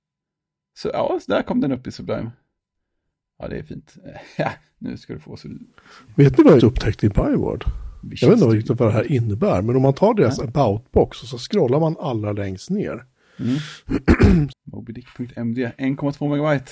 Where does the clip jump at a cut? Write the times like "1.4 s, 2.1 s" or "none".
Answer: 6.6 s, 14.5 s

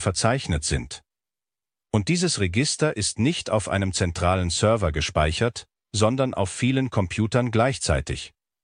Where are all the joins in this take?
none

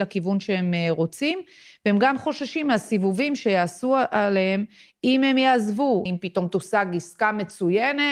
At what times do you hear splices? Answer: 6.1 s

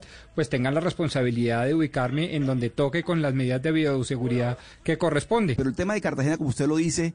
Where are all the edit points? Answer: 5.6 s

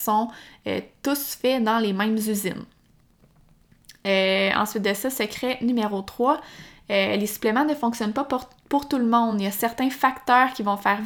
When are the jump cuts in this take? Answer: none

